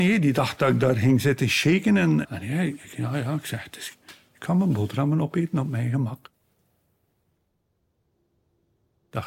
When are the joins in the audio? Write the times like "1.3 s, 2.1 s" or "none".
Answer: 2.2 s, 3.9 s